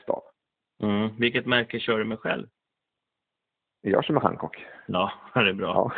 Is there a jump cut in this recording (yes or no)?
no